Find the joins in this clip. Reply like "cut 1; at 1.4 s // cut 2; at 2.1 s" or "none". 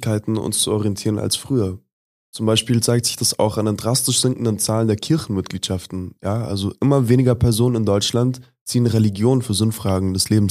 none